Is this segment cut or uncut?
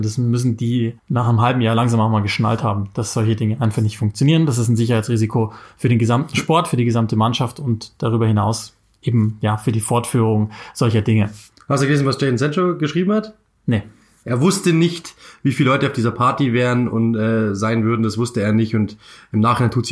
cut